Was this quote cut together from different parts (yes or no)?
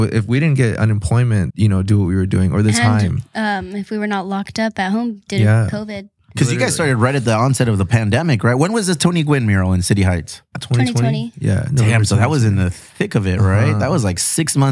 yes